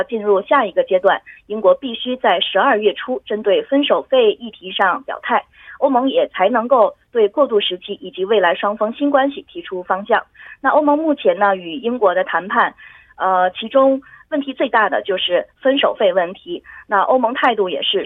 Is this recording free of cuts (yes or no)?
yes